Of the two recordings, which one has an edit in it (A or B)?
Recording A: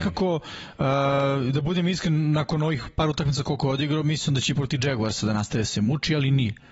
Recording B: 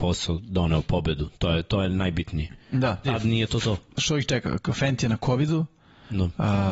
B